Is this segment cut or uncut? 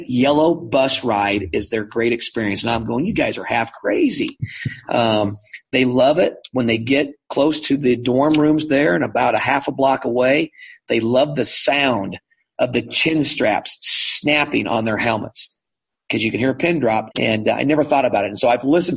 cut